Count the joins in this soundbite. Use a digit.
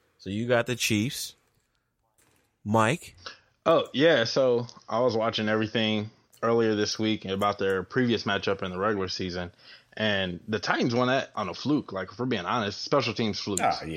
0